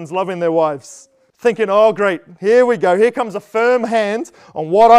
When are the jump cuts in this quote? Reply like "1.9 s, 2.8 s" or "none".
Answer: 1.3 s